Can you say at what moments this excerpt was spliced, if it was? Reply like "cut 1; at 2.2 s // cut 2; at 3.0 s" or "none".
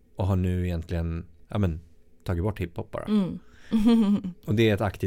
none